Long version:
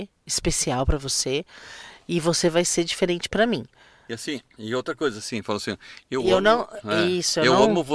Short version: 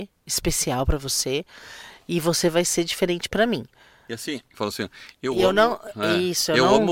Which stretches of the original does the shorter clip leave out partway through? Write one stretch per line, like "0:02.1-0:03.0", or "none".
0:04.5-0:05.4